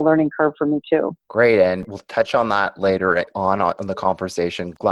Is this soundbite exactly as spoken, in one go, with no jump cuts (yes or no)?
no